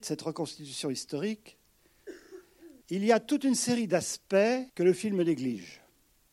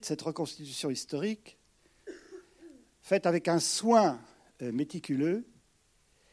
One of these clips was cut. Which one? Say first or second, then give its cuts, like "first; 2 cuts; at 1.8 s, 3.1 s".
first; 2 cuts; at 2.8 s, 4.7 s